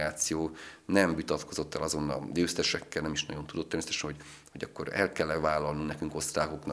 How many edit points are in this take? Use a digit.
0